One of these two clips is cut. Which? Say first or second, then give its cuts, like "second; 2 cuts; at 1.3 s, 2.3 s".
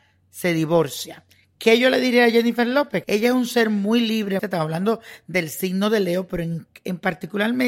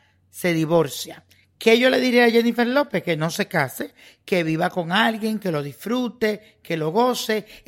first; 2 cuts; at 3.0 s, 4.4 s